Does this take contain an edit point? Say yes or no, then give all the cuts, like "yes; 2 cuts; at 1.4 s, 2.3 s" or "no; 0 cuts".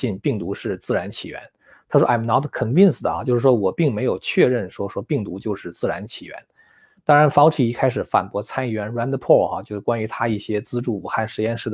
no; 0 cuts